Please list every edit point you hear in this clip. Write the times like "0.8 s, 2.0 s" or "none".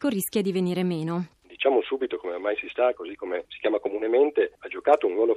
1.4 s, 2.9 s